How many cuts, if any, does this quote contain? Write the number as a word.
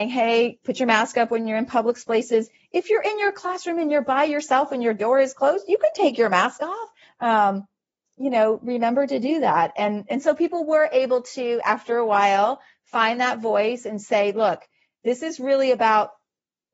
one